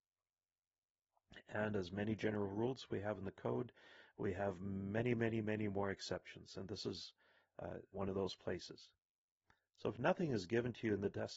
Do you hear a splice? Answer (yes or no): yes